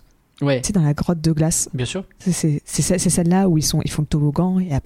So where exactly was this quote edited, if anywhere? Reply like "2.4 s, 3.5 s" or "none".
none